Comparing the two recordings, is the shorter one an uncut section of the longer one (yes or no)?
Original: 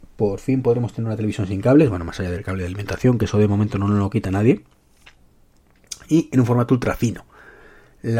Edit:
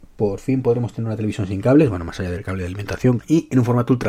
no